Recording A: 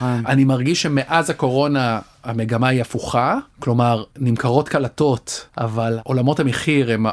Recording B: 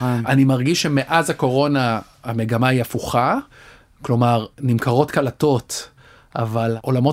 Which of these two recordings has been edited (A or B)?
A